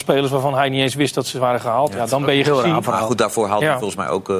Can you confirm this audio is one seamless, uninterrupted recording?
yes; 0 cuts

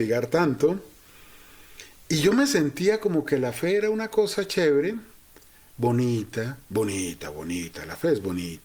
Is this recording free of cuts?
yes; 0 cuts

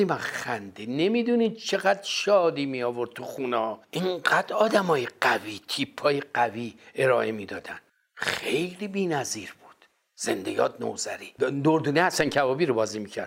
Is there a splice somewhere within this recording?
no; 0 cuts

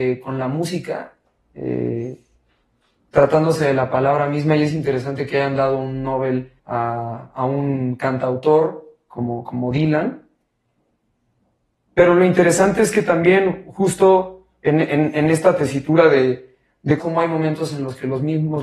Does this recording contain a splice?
yes; 2 cuts; at 6.6 s, 17.0 s

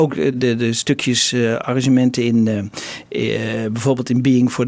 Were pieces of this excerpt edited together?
no; 0 cuts

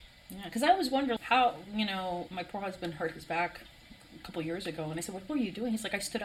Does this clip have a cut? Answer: yes; 2 cuts; at 1.2 s, 2.3 s

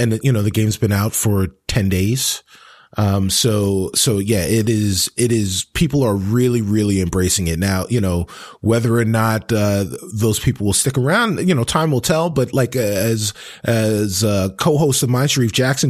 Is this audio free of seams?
yes; 0 cuts

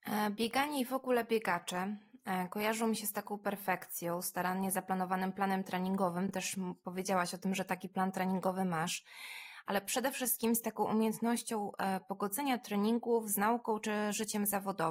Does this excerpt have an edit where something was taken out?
no; 0 cuts

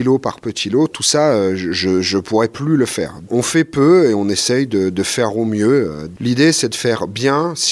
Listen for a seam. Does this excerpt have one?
no; 0 cuts

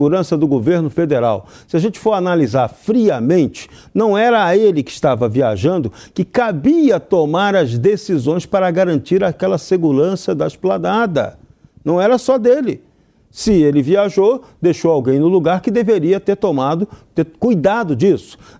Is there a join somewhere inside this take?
no; 0 cuts

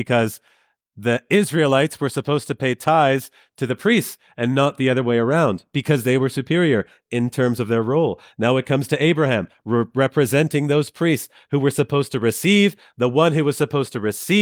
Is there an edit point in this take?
no; 0 cuts

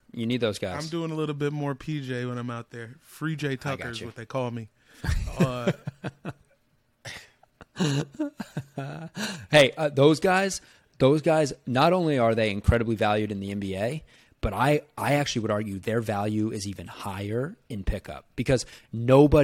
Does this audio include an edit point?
no; 0 cuts

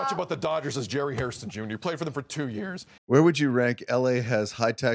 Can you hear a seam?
yes; 1 cut; at 3.0 s

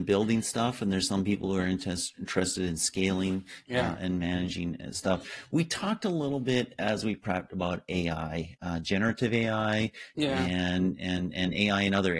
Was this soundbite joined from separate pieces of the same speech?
no; 0 cuts

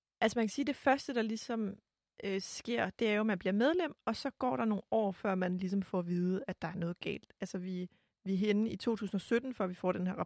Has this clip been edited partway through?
no; 0 cuts

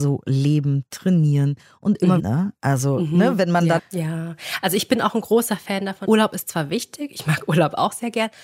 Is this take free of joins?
no; 3 cuts; at 2.2 s, 3.8 s, 6.0 s

